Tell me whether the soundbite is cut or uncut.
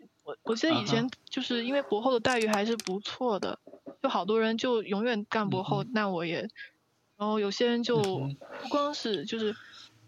cut